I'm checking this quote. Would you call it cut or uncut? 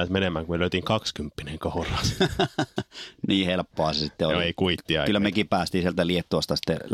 uncut